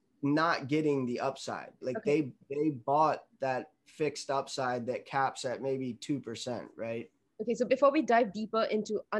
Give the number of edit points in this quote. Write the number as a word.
one